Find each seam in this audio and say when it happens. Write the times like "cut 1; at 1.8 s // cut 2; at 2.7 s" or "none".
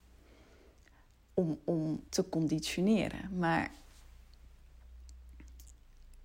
cut 1; at 2.1 s

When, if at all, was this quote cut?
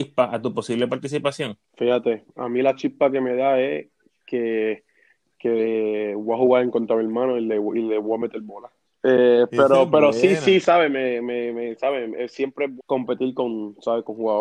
cut 1; at 8.8 s // cut 2; at 12.8 s

